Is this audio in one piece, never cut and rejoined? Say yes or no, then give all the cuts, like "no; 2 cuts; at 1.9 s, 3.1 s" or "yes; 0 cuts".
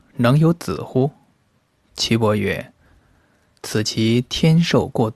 no; 1 cut; at 1.8 s